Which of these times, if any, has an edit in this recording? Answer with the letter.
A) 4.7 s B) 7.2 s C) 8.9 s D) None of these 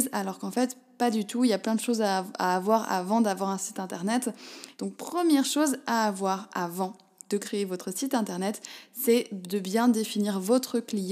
A